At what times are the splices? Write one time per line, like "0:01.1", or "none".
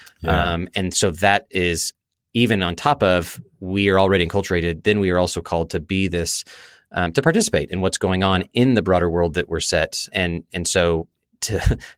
0:10.1